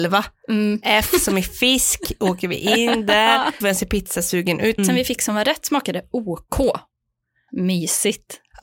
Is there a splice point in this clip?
yes; 3 cuts; at 3.6 s, 4.8 s, 7.5 s

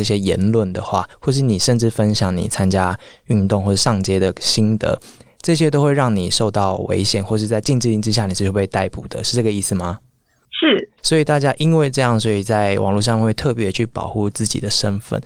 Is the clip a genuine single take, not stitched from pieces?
yes; 0 cuts

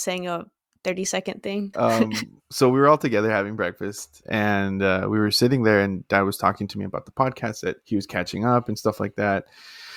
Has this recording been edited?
yes; 3 cuts; at 1.7 s, 4.2 s, 7.8 s

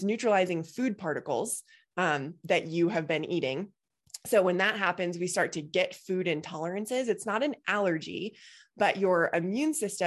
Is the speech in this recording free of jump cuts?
yes; 0 cuts

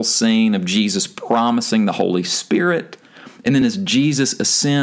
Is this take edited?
no; 0 cuts

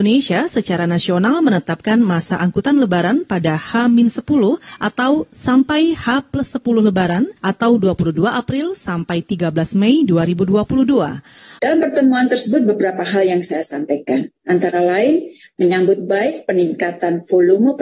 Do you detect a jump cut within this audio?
yes; 2 cuts; at 7.4 s, 11.6 s

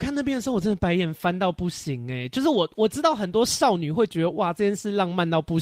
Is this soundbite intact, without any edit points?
yes; 0 cuts

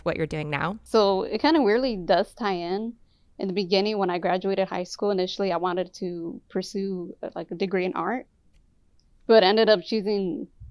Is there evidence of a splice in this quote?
no; 0 cuts

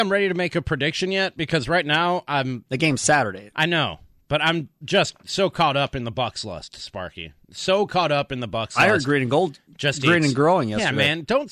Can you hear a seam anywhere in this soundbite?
no; 0 cuts

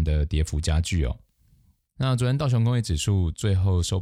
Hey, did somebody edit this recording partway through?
no; 0 cuts

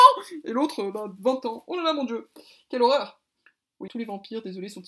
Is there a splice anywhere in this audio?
yes; 1 cut; at 3.9 s

